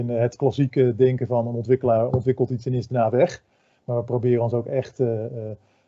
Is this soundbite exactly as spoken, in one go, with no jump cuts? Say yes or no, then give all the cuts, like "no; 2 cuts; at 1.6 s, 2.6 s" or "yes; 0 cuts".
yes; 0 cuts